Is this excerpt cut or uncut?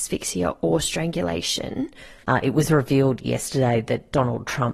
cut